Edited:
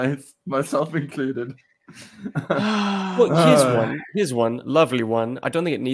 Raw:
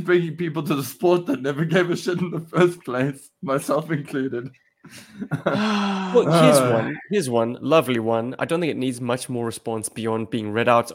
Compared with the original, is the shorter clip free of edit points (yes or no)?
yes